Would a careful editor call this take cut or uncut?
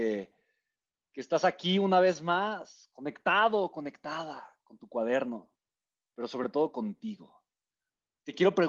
uncut